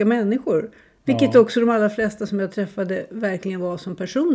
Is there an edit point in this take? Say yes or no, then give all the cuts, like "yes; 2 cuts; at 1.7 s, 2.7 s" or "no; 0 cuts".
no; 0 cuts